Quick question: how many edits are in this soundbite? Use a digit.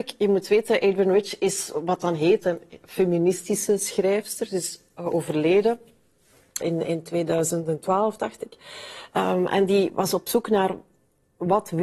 1